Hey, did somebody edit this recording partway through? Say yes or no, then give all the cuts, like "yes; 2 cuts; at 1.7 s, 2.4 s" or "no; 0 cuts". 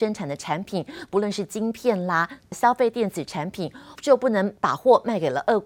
yes; 2 cuts; at 2.5 s, 4.0 s